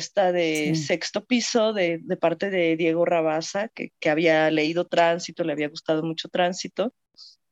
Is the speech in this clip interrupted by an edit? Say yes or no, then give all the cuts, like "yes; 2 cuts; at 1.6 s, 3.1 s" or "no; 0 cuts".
no; 0 cuts